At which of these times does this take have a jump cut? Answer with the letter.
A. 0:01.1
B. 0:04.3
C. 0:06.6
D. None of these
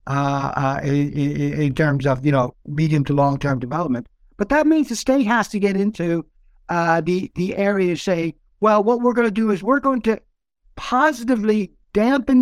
D